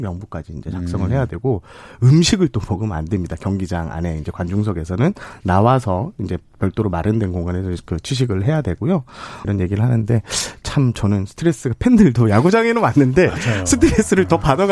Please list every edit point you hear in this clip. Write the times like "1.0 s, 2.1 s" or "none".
9.4 s